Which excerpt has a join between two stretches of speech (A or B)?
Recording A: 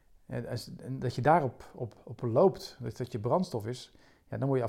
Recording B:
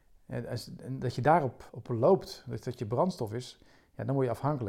B